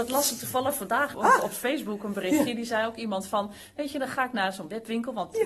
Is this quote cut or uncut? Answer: cut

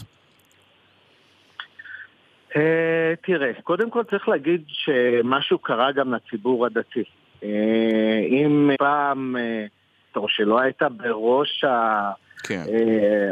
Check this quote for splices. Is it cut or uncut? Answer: cut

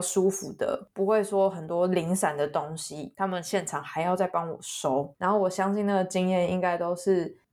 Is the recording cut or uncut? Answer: cut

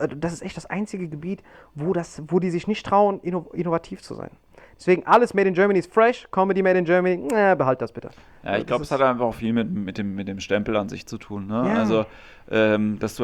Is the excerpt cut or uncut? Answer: uncut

